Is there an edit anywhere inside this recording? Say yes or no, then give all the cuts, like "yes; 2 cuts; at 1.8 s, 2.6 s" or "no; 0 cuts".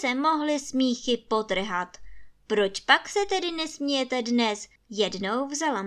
yes; 1 cut; at 4.8 s